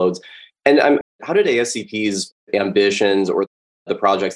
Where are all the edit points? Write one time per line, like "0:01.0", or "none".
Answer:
0:01.0
0:02.4